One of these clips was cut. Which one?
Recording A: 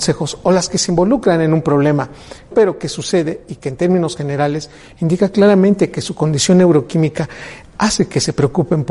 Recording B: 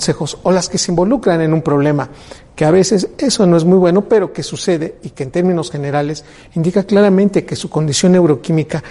A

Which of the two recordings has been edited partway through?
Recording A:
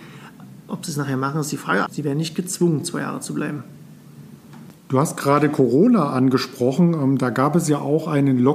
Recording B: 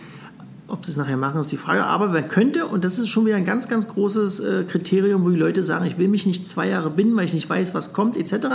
A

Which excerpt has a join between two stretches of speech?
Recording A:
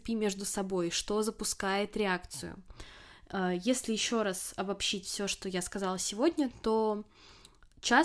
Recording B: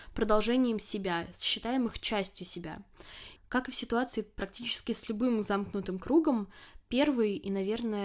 B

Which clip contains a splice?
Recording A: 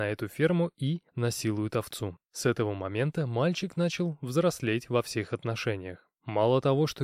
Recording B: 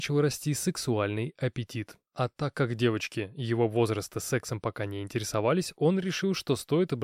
A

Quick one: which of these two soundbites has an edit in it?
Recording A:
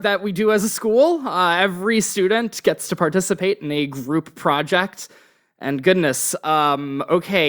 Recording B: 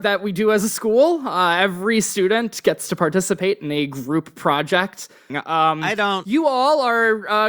B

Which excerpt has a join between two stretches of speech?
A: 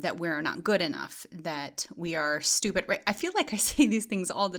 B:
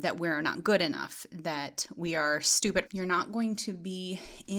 B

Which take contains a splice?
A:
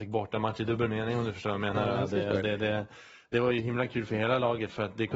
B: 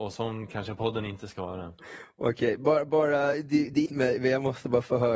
B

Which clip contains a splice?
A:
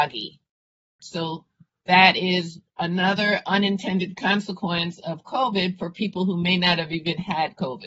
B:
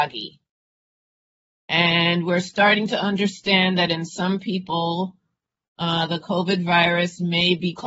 A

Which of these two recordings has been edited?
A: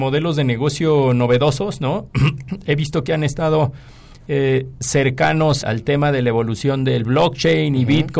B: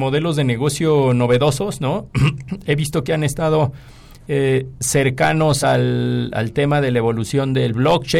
A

